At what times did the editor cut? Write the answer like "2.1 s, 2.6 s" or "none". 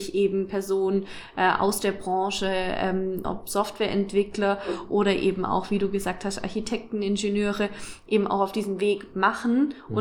3.2 s